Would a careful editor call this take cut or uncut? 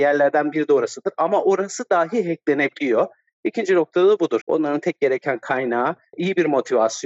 cut